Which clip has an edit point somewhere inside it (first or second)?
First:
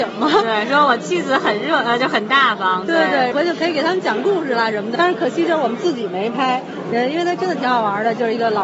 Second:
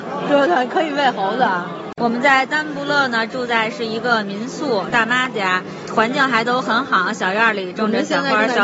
first